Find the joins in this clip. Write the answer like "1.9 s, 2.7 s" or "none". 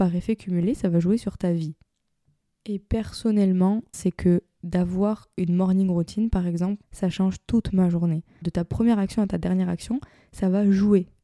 3.9 s, 6.8 s, 8.4 s